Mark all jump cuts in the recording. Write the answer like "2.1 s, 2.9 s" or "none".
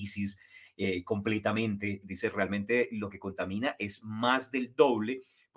2.0 s